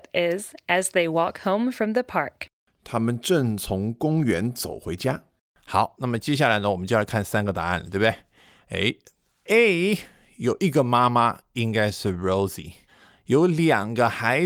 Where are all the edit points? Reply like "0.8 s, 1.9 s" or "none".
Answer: none